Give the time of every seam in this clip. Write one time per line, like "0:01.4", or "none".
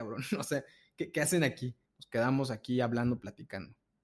0:01.9